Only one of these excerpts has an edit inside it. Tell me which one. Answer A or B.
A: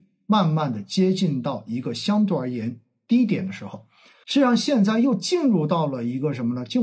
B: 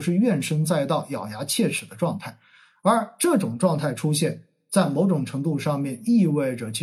A